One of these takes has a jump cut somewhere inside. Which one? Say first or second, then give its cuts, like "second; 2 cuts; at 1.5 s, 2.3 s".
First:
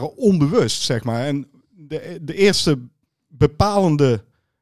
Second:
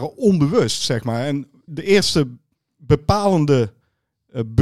second; 1 cut; at 1.7 s